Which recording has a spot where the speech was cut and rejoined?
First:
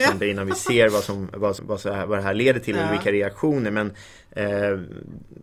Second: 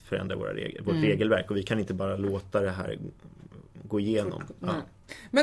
first; 1 cut; at 1.6 s

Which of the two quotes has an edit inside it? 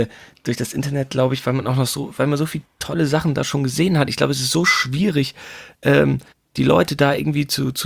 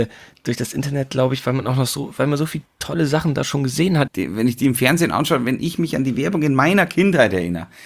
second; 1 cut; at 4.1 s

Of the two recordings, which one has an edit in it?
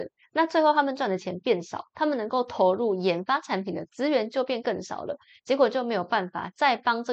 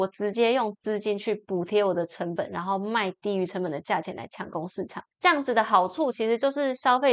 second; 1 cut; at 5.1 s

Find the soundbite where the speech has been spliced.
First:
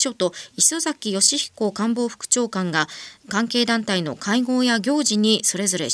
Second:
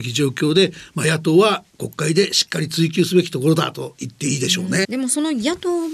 second; 1 cut; at 4.8 s

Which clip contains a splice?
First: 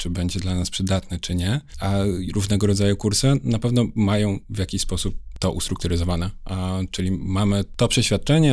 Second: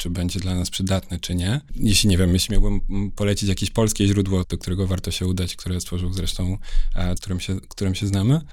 second; 3 cuts; at 1.7 s, 4.4 s, 7.2 s

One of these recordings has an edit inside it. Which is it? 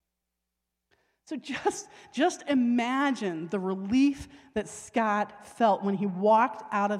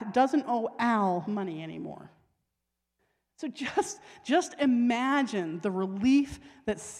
second; 1 cut; at 3.3 s

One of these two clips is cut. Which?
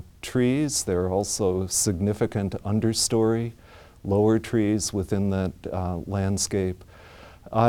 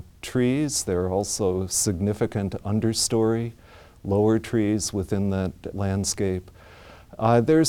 second; 1 cut; at 5.7 s

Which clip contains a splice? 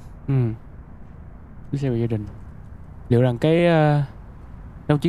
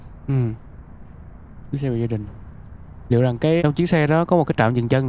second; 1 cut; at 3.6 s

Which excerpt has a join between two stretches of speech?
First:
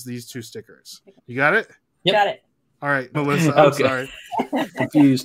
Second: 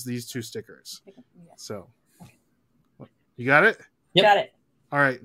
first; 2 cuts; at 1.2 s, 3.1 s

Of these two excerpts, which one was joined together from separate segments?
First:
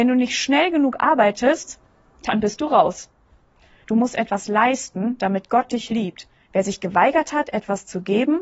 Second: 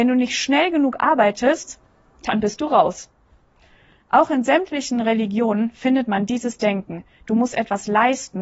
first; 2 cuts; at 3.8 s, 6.3 s

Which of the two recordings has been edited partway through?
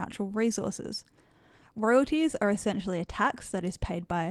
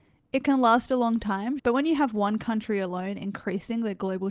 second; 1 cut; at 1.6 s

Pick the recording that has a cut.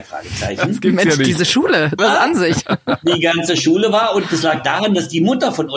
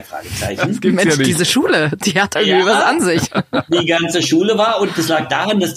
first; 1 cut; at 2.0 s

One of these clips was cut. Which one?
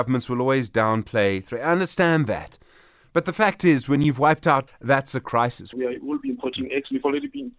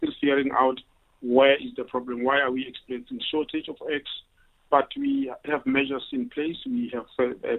first; 2 cuts; at 4.7 s, 5.7 s

